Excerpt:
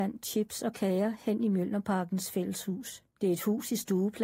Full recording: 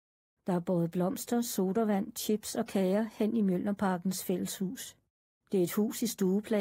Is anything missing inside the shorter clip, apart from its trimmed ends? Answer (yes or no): yes